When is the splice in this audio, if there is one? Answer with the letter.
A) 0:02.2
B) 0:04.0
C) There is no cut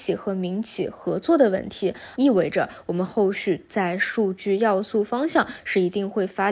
A